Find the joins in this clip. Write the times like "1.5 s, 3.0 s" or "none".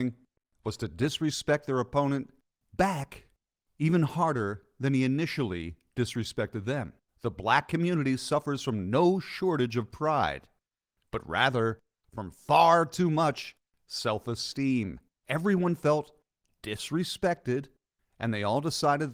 7.1 s, 15.2 s